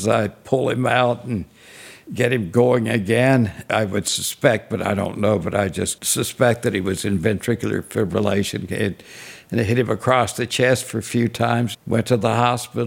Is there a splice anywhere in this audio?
yes; 1 cut; at 11.7 s

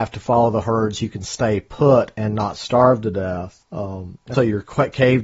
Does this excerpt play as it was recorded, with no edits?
no; 1 cut; at 4.3 s

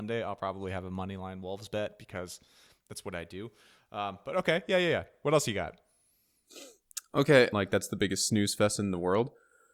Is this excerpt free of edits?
no; 1 cut; at 7.5 s

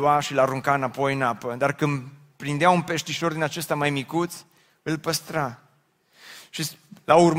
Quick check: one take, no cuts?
yes; 0 cuts

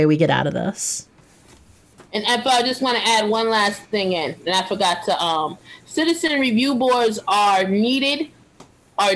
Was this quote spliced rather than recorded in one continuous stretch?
no; 0 cuts

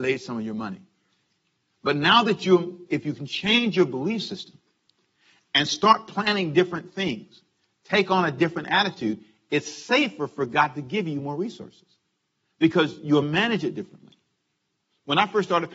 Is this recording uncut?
no; 1 cut; at 2.9 s

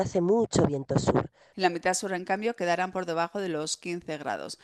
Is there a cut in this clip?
yes; 1 cut; at 1.5 s

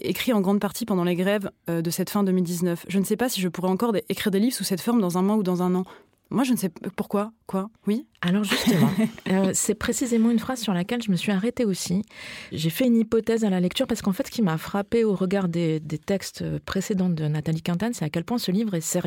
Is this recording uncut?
no; 1 cut; at 7.8 s

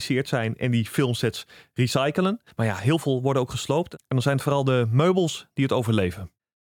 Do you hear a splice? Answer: yes; 1 cut; at 2.5 s

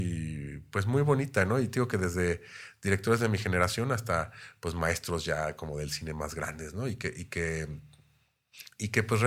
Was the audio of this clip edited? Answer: no; 0 cuts

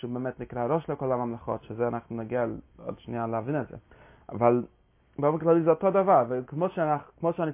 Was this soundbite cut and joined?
no; 0 cuts

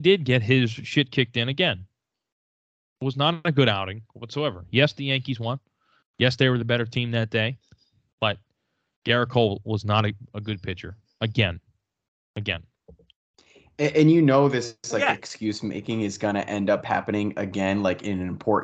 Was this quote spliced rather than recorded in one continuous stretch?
no; 0 cuts

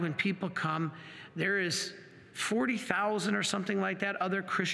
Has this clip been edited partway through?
no; 0 cuts

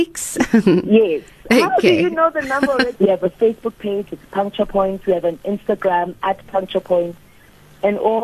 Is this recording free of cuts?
no; 1 cut; at 2.9 s

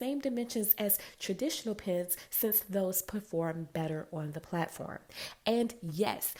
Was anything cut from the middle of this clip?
no; 0 cuts

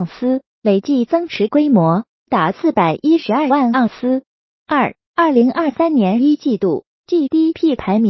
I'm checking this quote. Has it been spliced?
no; 0 cuts

